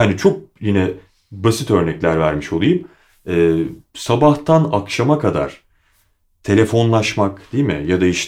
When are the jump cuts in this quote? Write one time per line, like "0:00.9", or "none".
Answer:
none

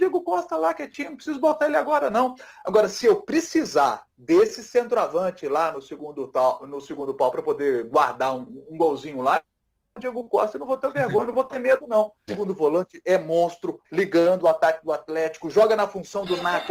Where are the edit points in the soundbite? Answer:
0:12.3
0:13.8

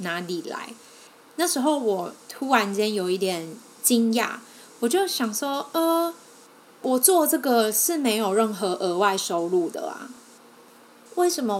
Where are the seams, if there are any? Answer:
none

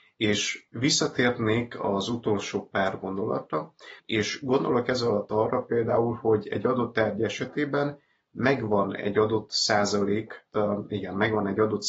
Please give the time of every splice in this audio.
0:04.0
0:10.5

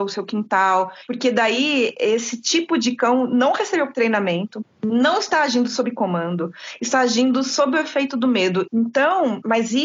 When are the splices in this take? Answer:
0:08.7

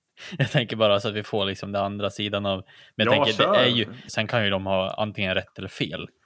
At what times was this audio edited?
0:04.1

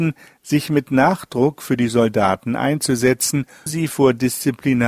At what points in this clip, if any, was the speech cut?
0:03.7

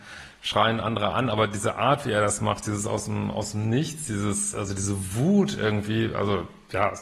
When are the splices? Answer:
none

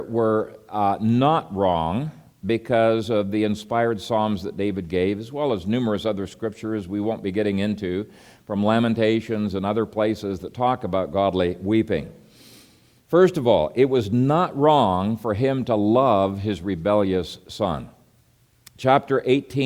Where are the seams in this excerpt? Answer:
none

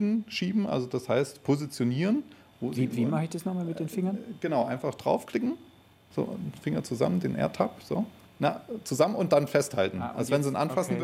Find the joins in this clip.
none

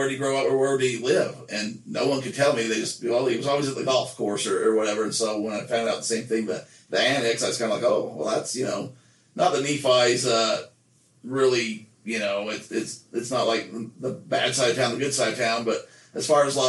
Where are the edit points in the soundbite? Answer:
none

